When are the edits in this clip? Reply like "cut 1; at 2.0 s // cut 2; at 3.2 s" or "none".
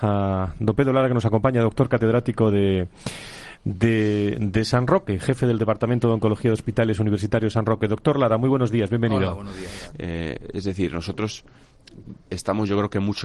cut 1; at 9.9 s // cut 2; at 12.3 s

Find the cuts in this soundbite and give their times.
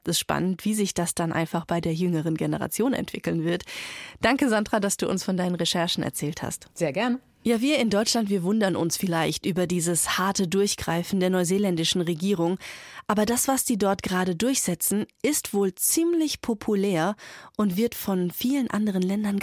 none

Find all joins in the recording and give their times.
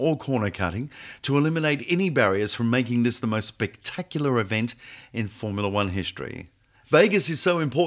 cut 1; at 6.8 s

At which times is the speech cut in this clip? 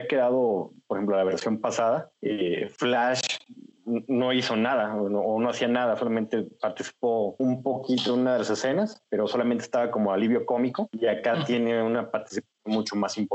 cut 1; at 7.4 s // cut 2; at 9.1 s

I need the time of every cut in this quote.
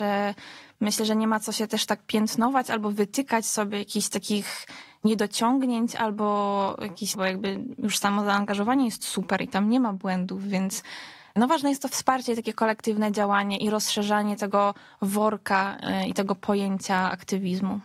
cut 1; at 7.1 s

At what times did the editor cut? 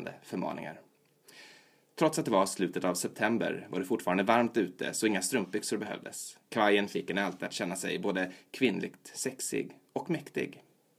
cut 1; at 6.5 s

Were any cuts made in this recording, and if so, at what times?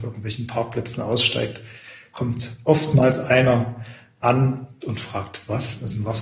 none

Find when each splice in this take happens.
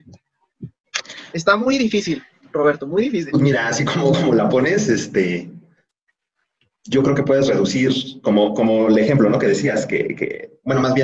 none

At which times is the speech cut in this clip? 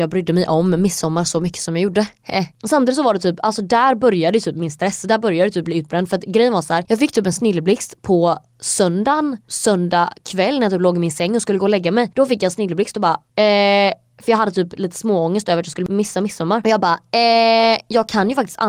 none

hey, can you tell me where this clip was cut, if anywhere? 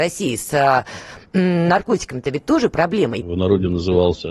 cut 1; at 3.2 s

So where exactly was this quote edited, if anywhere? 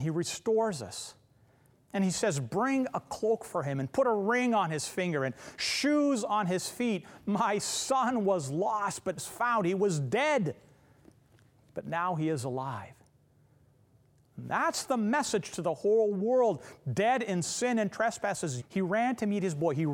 cut 1; at 9.2 s // cut 2; at 18.6 s

